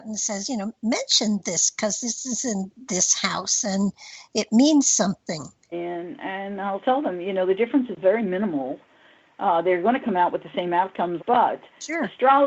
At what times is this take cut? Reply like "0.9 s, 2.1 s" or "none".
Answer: 5.7 s, 11.2 s